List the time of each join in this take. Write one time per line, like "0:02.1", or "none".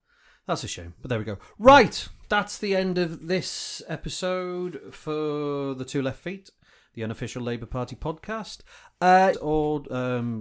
0:09.3